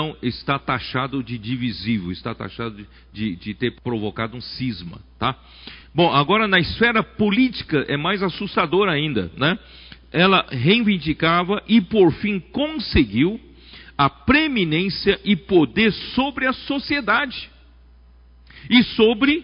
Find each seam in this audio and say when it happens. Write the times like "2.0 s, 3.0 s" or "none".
none